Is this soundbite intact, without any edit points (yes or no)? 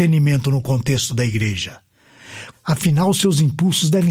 no